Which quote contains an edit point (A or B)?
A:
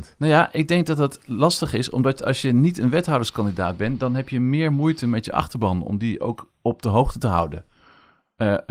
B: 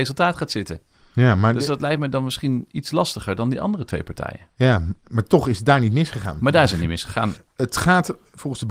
B